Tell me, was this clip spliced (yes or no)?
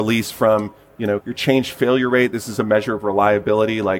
yes